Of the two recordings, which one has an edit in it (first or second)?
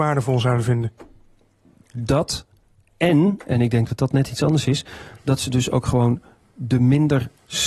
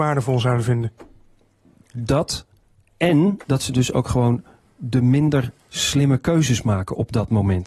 second